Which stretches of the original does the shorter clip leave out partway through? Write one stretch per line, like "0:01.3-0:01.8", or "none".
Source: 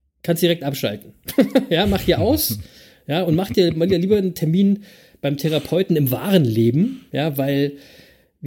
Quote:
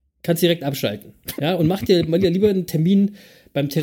0:01.4-0:03.0